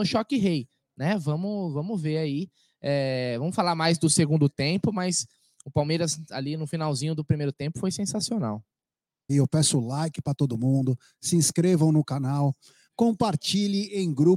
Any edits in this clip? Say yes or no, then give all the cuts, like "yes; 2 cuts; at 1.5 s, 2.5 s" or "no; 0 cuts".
yes; 2 cuts; at 9.3 s, 12.9 s